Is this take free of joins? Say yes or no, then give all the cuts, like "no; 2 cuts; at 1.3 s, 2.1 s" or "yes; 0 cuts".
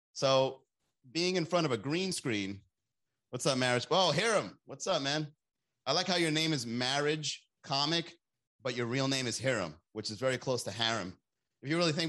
yes; 0 cuts